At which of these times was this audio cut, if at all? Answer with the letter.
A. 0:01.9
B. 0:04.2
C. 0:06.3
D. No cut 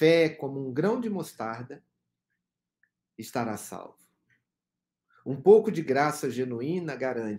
D